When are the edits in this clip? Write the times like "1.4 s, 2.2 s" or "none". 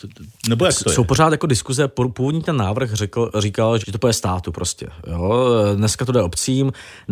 3.8 s